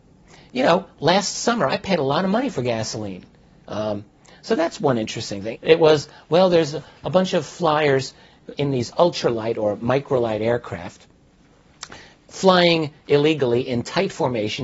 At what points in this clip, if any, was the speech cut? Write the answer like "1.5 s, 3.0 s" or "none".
3.6 s, 5.5 s, 8.5 s